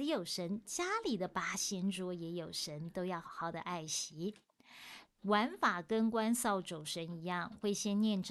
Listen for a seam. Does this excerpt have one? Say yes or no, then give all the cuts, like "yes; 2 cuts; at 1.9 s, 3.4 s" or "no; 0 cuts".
yes; 2 cuts; at 3.2 s, 5.0 s